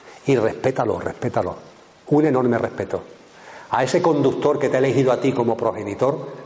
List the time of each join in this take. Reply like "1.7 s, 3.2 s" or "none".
none